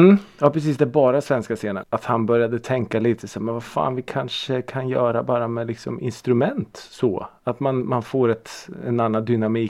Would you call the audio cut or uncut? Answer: cut